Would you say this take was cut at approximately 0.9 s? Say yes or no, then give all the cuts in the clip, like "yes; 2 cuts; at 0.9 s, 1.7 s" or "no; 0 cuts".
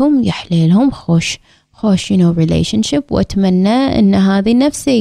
no; 0 cuts